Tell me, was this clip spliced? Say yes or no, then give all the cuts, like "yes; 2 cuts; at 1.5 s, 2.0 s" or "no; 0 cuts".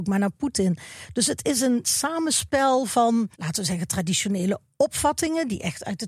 yes; 1 cut; at 3.3 s